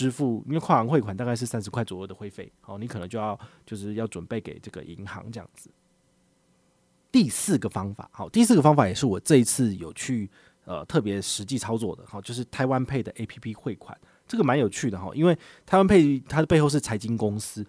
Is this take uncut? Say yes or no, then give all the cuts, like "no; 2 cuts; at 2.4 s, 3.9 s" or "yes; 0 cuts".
yes; 0 cuts